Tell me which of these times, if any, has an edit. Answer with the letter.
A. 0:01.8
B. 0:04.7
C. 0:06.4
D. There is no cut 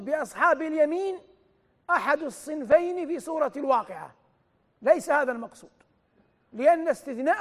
D